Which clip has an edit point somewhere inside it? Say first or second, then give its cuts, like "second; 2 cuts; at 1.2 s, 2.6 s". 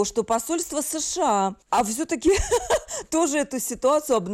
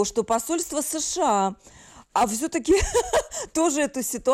first; 1 cut; at 1.6 s